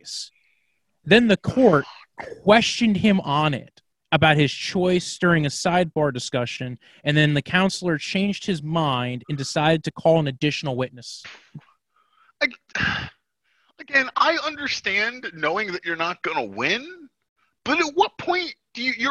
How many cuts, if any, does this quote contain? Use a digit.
0